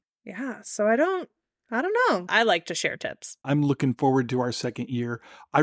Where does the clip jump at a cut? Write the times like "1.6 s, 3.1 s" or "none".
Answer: 2.3 s, 3.4 s